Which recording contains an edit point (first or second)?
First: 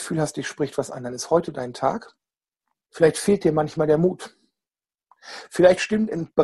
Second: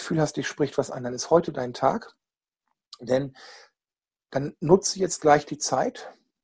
first